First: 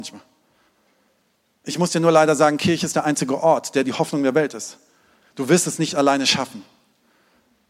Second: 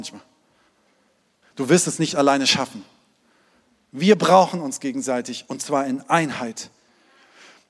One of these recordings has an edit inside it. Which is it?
second; 1 cut; at 1.4 s

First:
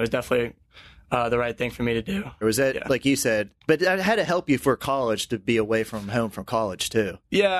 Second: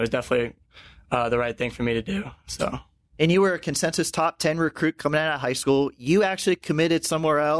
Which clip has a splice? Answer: first; 2 cuts; at 2.4 s, 3.6 s

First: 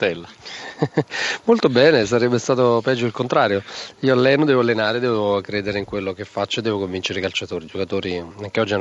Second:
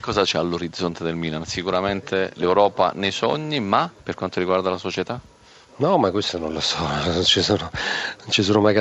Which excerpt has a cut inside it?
second; 1 cut; at 4.0 s

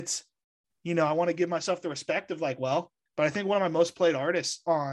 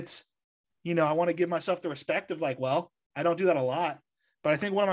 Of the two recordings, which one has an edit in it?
first; 1 cut; at 3.1 s

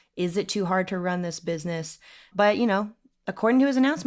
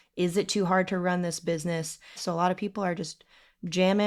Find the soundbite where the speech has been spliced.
second; 1 cut; at 2.2 s

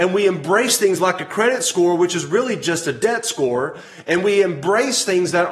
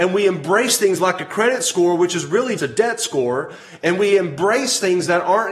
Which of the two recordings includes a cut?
second; 1 cut; at 2.6 s

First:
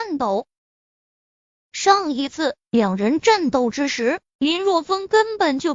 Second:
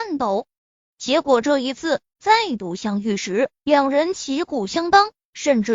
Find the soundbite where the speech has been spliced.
second; 1 cut; at 0.9 s

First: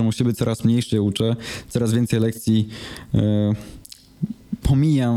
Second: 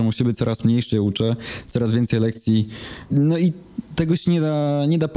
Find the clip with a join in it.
second; 1 cut; at 3.1 s

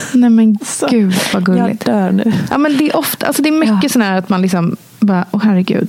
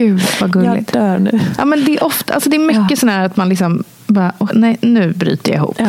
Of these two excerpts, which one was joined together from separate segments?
second; 1 cut; at 4.5 s

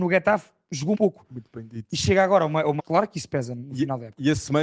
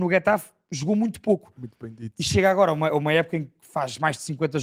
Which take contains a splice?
first; 2 cuts; at 0.9 s, 2.8 s

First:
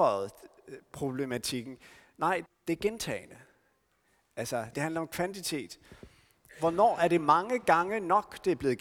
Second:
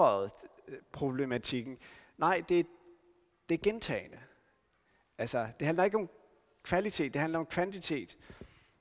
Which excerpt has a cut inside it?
first; 2 cuts; at 2.5 s, 4.7 s

